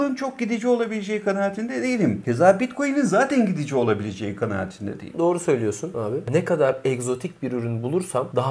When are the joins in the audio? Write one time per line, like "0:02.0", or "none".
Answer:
0:06.3